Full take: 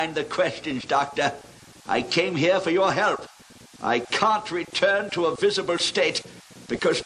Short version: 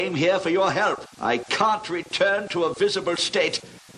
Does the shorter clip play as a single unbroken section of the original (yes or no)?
no